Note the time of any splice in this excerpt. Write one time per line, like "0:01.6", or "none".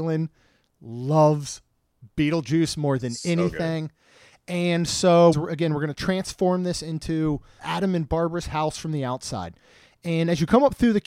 0:05.3
0:07.6